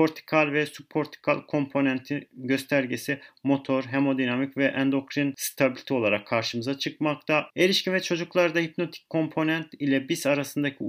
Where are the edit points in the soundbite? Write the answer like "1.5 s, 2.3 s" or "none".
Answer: 7.5 s

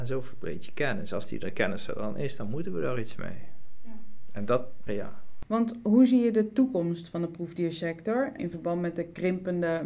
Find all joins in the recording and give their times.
4.9 s, 8.4 s

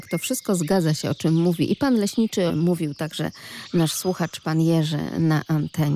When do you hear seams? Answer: 2.5 s

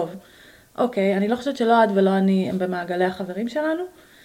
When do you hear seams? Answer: none

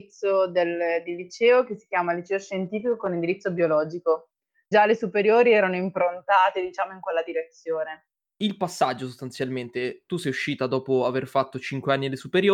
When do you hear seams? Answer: 4.7 s, 8.2 s

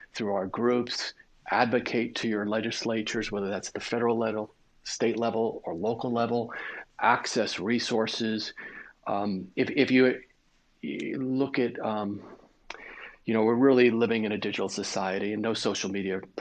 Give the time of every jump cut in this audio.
none

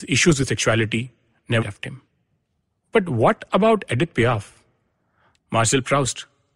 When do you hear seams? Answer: 1.6 s, 5.4 s

